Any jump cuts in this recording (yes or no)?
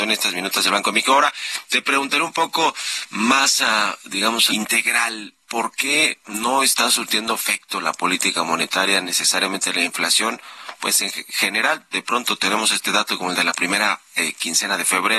yes